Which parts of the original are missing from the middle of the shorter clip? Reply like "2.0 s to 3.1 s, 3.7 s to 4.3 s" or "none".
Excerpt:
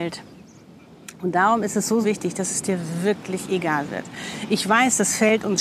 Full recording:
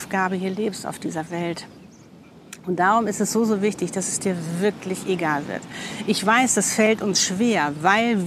3.5 s to 3.6 s